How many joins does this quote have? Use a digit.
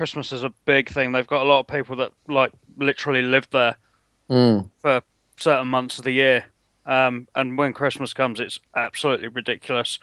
0